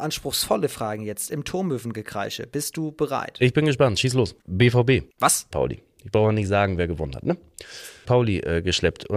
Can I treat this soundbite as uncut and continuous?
no; 3 cuts; at 4.4 s, 5.5 s, 8.0 s

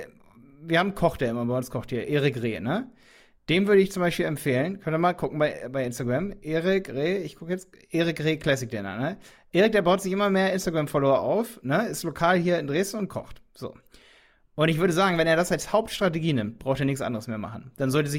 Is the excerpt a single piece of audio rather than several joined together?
yes; 0 cuts

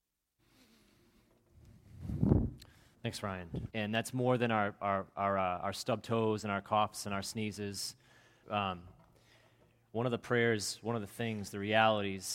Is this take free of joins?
no; 2 cuts; at 3.7 s, 8.4 s

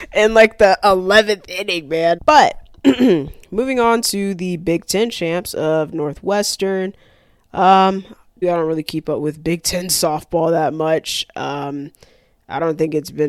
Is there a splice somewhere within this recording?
yes; 2 cuts; at 2.2 s, 8.4 s

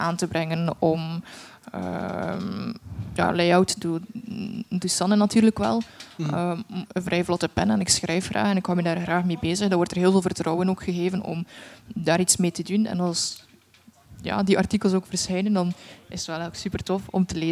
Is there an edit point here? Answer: yes; 1 cut; at 6.9 s

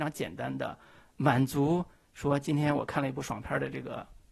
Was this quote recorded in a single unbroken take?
yes; 0 cuts

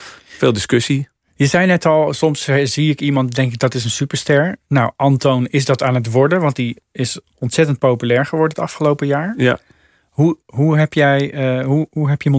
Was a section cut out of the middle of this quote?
no; 0 cuts

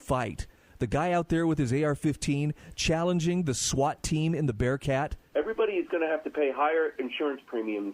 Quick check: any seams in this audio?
yes; 1 cut; at 5.3 s

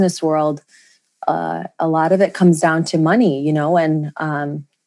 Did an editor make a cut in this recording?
no; 0 cuts

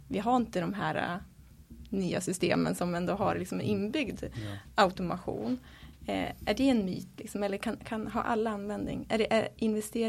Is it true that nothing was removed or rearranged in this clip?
yes; 0 cuts

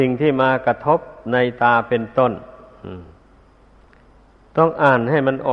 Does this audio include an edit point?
no; 0 cuts

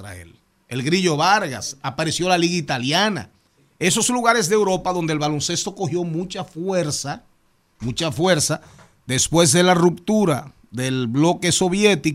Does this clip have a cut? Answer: no; 0 cuts

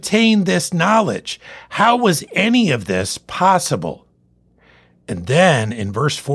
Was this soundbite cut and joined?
no; 0 cuts

